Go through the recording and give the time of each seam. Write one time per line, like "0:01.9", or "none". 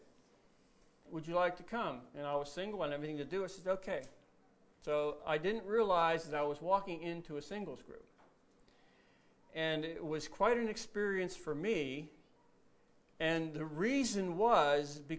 0:01.1